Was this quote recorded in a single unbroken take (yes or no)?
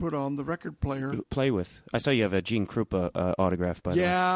no